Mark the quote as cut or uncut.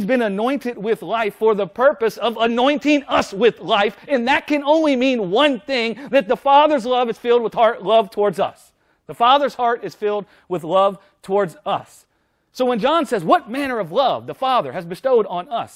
uncut